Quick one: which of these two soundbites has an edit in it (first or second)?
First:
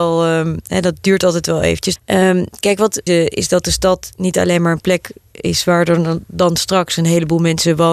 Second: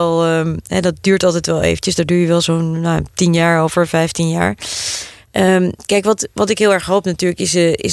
first